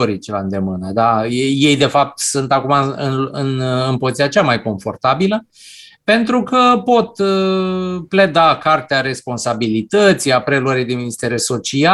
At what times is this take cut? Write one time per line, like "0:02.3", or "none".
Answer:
none